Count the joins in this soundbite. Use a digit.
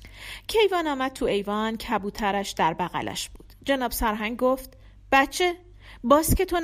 0